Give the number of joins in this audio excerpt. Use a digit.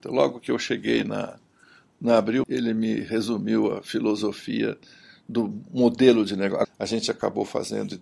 2